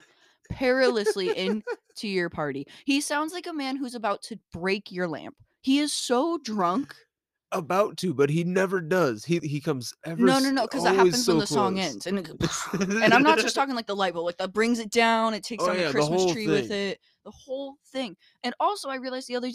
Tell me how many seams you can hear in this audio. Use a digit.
1